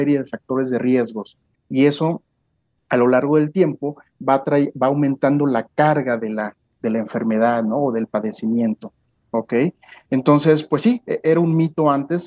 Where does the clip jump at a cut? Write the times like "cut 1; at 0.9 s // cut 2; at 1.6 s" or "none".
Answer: cut 1; at 1.5 s